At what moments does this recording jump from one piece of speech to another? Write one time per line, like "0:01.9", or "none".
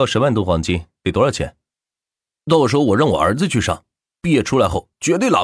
0:02.4